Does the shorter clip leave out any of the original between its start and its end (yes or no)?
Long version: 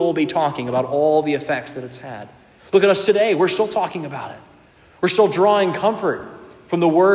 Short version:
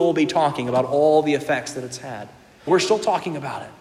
yes